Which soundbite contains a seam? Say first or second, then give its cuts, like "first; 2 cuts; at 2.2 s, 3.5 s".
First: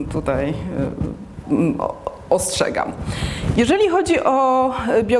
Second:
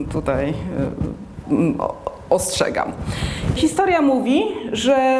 second; 1 cut; at 3.6 s